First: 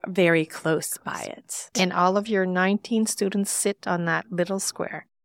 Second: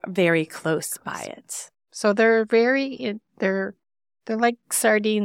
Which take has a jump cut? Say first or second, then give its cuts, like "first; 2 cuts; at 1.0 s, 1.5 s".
first; 1 cut; at 1.7 s